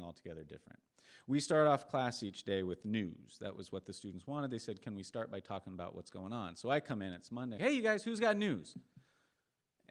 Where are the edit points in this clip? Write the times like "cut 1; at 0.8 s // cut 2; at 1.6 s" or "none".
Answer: cut 1; at 7.6 s